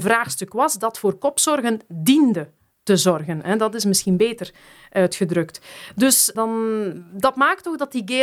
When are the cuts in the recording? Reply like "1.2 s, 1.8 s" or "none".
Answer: 6.4 s